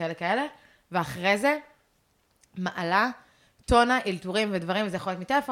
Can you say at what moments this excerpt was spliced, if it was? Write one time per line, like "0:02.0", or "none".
none

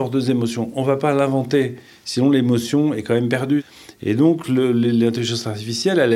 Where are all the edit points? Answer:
none

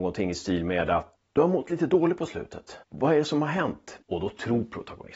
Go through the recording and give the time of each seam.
0:01.1
0:02.8
0:04.0

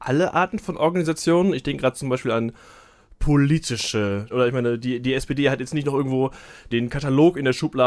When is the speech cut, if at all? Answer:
0:04.3

